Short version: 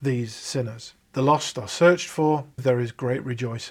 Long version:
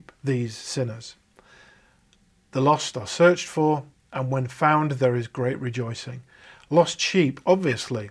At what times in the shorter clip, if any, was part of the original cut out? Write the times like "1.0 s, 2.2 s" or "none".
1.0 s, 2.6 s